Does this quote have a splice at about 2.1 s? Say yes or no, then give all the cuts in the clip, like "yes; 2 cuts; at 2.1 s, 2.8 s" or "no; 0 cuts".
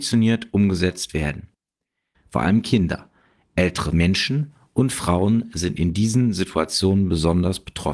yes; 1 cut; at 2.1 s